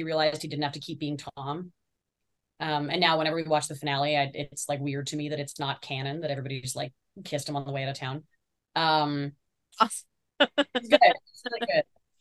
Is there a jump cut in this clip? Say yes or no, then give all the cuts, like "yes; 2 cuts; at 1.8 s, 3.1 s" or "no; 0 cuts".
no; 0 cuts